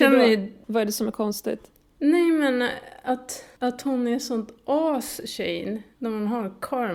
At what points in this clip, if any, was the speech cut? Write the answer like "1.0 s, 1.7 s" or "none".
none